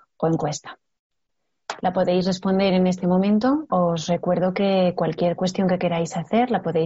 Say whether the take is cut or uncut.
cut